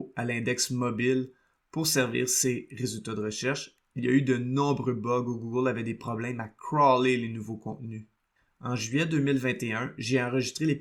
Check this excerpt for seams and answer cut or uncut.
uncut